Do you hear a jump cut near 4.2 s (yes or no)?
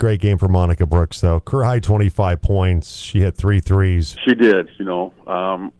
yes